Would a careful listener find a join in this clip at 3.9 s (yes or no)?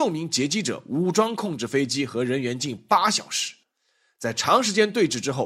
no